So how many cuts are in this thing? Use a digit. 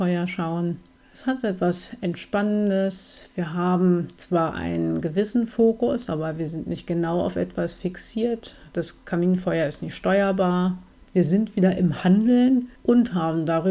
2